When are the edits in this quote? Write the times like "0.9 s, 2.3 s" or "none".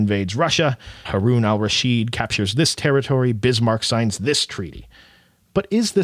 1.0 s

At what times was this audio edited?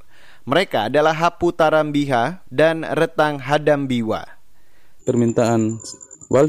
2.4 s, 5.0 s

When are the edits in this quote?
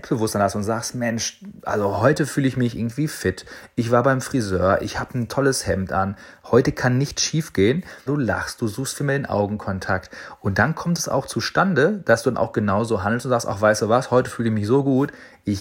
8.1 s

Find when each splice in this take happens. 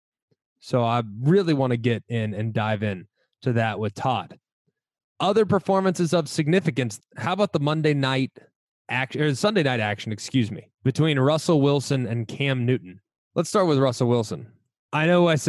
7.0 s, 10.7 s

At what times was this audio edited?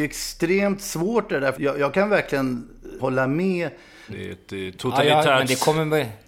1.5 s, 3.0 s, 4.1 s

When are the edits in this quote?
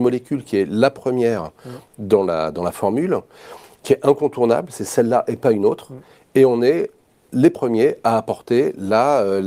none

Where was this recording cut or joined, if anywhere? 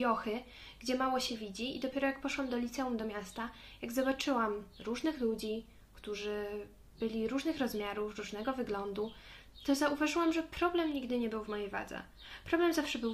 none

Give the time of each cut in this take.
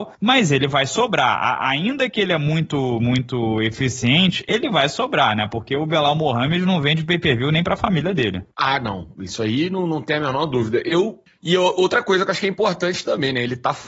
none

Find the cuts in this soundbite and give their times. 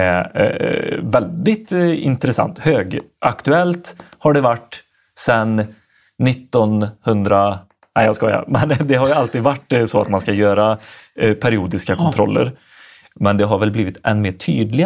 none

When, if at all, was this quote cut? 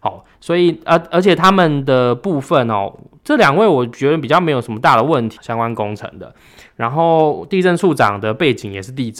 5.4 s

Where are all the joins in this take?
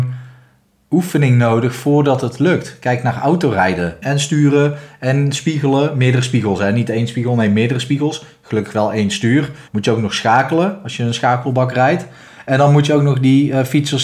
4.0 s, 9.7 s

